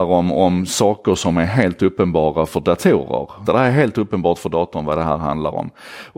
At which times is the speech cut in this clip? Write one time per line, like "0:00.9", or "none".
0:03.5